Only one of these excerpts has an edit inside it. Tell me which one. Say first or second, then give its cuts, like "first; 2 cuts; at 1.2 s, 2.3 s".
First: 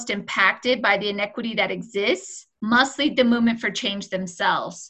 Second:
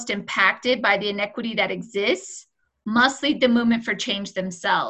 first; 1 cut; at 2.6 s